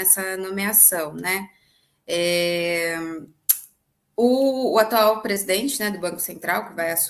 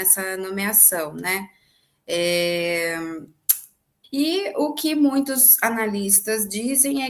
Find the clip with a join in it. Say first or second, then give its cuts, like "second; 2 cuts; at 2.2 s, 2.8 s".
second; 1 cut; at 4.0 s